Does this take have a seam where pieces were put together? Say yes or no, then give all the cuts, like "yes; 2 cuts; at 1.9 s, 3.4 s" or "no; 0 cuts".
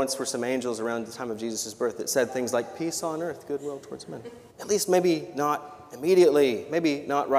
yes; 1 cut; at 4.5 s